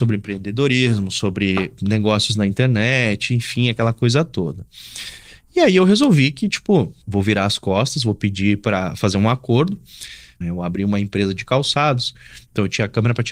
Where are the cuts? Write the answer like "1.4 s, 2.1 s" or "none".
10.4 s